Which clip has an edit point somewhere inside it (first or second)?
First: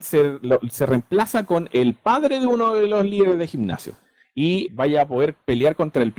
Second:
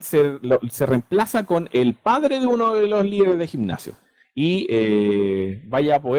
first